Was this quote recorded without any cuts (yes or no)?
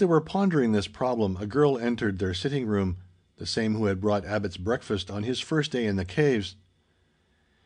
yes